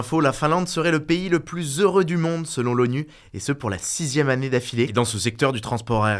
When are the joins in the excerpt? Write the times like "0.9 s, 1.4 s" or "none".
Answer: 4.9 s